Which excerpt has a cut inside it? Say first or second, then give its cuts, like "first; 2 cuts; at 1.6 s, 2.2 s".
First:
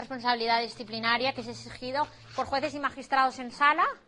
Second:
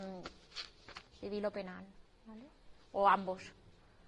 second; 1 cut; at 1.1 s